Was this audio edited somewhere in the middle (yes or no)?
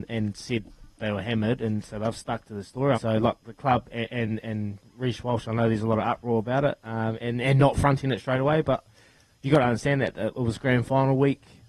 yes